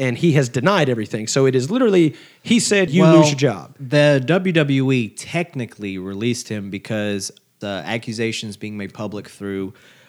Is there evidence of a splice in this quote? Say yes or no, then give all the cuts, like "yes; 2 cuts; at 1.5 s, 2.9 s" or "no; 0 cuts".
yes; 2 cuts; at 2.9 s, 7.6 s